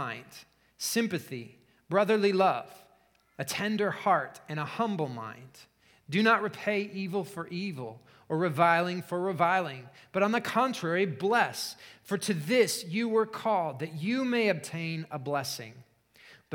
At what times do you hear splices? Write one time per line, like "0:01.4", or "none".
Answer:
none